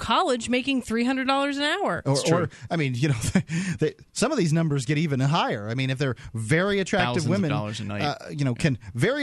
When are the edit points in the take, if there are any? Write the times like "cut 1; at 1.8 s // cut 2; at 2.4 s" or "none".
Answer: none